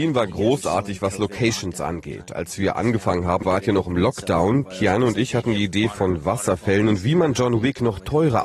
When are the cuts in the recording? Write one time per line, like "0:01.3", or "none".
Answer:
0:03.4
0:04.6